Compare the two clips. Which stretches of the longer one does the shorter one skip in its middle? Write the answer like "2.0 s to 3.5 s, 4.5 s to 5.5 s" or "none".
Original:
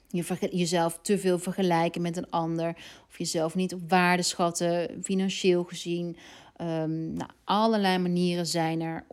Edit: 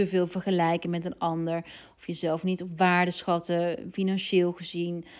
none